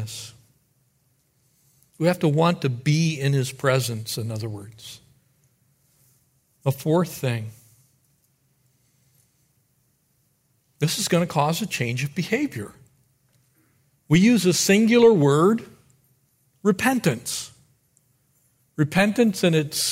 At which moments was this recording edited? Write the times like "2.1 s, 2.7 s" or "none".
none